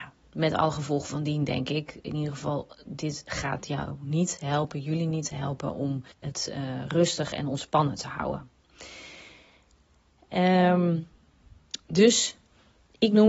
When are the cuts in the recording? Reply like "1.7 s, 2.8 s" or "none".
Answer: 6.1 s